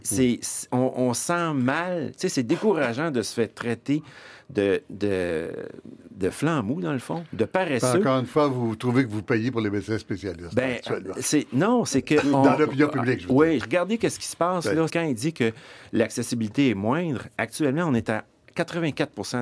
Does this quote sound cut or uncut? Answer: cut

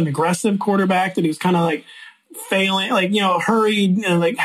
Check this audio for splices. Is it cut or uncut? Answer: uncut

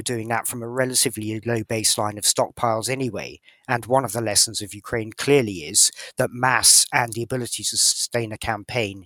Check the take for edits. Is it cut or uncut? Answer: uncut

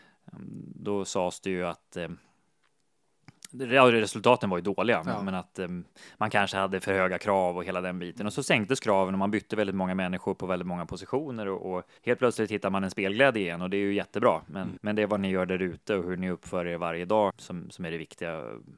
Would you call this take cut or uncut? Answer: cut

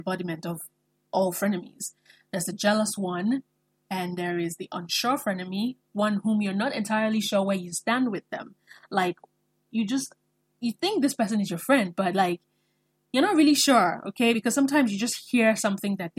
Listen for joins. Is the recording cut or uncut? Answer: uncut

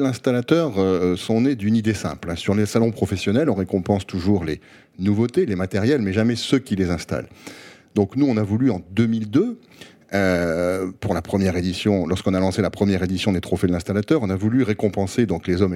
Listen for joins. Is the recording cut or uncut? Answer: uncut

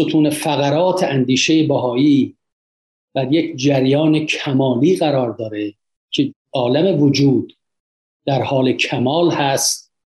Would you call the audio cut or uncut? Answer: uncut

